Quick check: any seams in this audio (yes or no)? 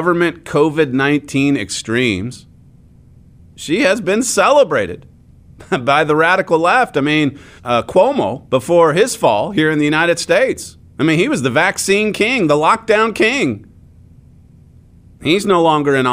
yes